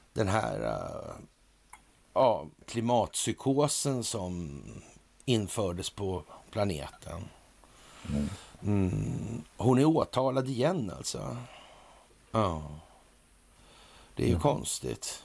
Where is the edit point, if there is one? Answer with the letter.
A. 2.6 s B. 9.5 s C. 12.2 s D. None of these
A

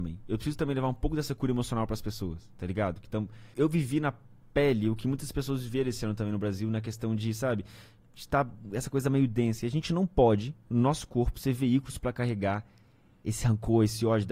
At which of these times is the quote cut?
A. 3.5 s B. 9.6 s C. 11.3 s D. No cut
A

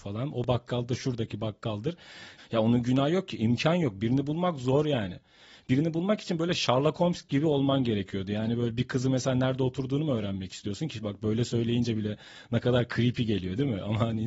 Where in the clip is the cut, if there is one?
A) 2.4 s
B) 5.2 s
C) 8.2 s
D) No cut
A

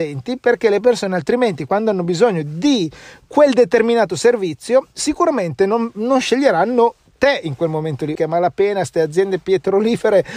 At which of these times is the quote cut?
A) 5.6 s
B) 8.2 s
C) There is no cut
B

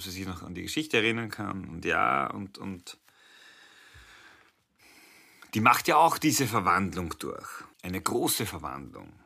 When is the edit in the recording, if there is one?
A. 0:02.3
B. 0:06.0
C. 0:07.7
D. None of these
C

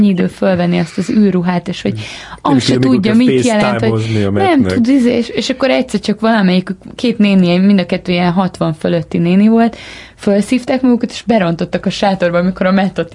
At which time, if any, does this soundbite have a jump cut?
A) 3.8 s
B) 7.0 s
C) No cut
B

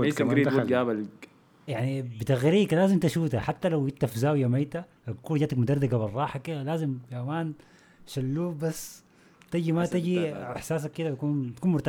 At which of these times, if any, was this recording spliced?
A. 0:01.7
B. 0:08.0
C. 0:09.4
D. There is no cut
A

